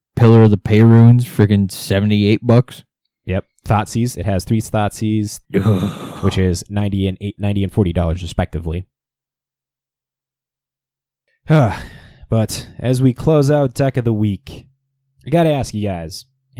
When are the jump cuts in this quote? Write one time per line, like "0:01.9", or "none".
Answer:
0:05.4
0:07.4